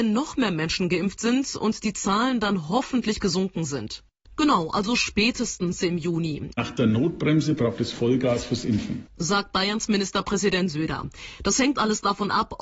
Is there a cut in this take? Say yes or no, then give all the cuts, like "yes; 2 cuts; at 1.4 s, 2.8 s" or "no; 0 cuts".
yes; 2 cuts; at 4.3 s, 6.5 s